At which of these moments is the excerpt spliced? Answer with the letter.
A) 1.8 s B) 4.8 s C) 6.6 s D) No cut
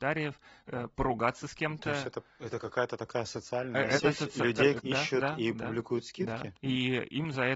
B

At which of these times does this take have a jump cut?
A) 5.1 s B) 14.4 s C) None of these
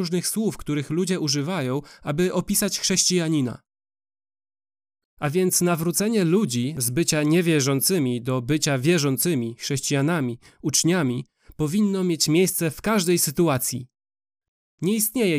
A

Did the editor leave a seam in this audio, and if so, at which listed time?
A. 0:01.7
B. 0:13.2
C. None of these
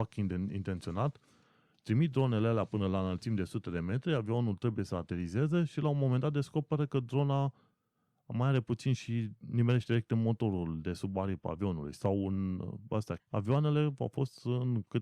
B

